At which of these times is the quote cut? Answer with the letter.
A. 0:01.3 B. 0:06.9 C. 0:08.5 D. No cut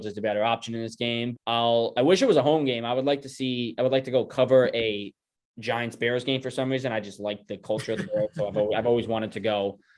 A